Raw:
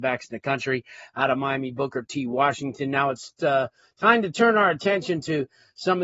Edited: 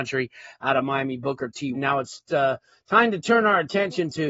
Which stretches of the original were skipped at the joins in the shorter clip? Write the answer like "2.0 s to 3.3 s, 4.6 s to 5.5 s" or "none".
2.3 s to 2.8 s